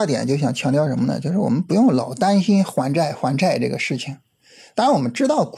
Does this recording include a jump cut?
no; 0 cuts

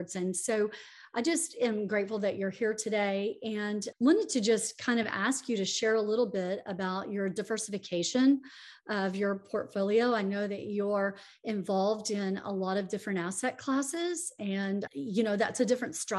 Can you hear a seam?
yes; 2 cuts; at 3.9 s, 14.9 s

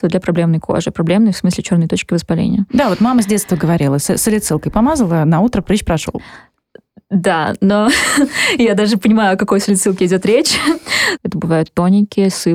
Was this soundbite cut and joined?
yes; 1 cut; at 11.2 s

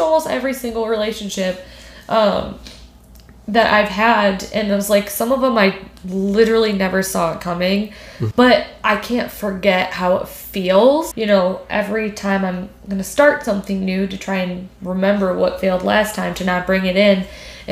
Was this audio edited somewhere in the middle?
yes; 2 cuts; at 8.3 s, 11.1 s

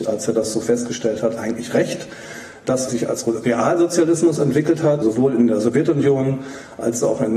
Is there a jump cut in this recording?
yes; 2 cuts; at 2.9 s, 5.0 s

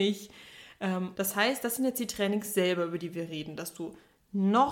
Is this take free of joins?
no; 1 cut; at 1.1 s

